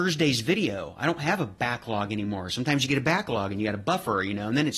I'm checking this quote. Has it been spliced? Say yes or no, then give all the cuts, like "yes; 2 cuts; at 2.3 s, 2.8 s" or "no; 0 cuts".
no; 0 cuts